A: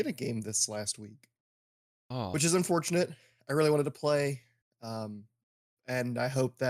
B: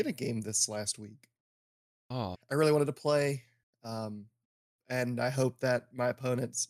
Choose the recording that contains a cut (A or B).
B